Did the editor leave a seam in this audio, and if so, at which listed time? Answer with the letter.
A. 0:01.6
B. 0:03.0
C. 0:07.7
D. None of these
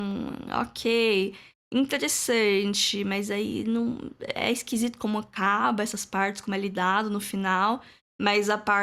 D